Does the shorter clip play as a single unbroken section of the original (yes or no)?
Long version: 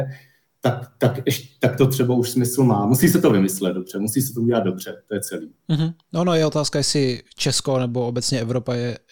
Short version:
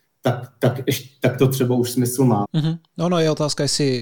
no